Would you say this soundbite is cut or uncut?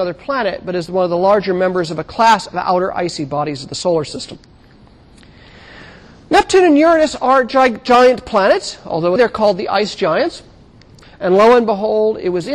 cut